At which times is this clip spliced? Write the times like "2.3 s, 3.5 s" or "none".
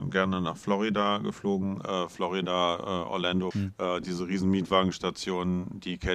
3.5 s